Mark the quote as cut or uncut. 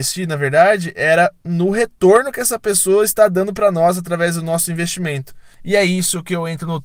cut